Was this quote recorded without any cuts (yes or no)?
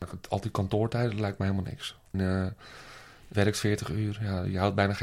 no